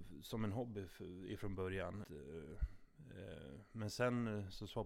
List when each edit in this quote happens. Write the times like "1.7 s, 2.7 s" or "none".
2.0 s